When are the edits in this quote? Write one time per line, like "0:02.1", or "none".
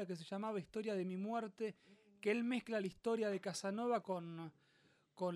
0:04.0